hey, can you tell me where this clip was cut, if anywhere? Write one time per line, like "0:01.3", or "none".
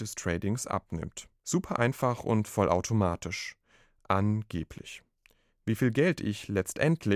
none